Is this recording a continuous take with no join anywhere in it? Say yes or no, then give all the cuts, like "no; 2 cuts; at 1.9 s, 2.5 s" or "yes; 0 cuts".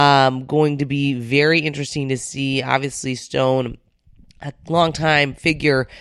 yes; 0 cuts